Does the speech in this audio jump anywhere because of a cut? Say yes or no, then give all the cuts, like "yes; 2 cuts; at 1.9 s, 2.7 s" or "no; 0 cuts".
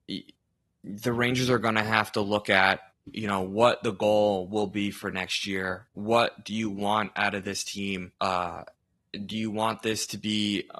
yes; 1 cut; at 8.2 s